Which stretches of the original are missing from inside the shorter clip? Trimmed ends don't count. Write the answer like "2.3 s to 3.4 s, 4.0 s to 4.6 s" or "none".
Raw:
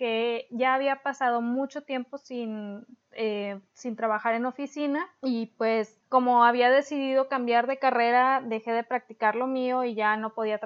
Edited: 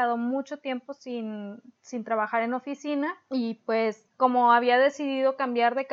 3.0 s to 3.7 s